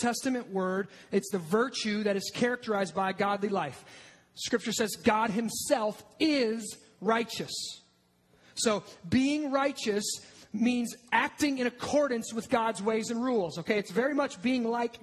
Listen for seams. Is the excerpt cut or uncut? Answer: uncut